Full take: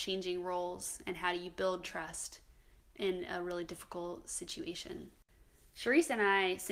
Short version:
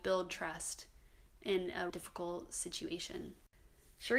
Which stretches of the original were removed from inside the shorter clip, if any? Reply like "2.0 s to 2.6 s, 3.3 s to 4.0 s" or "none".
3.4 s to 3.7 s